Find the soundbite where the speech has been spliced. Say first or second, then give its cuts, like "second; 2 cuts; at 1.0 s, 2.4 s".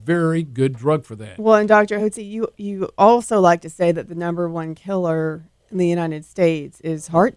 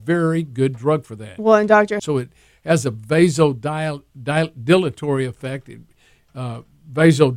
second; 1 cut; at 2.0 s